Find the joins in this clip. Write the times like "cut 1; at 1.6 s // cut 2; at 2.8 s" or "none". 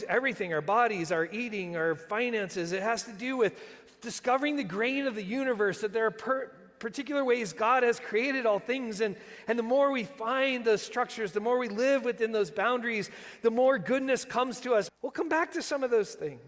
cut 1; at 14.9 s